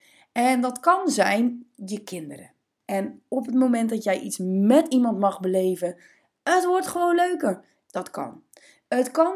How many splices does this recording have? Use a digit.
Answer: 2